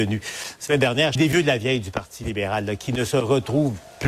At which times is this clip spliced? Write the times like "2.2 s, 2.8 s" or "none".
1.2 s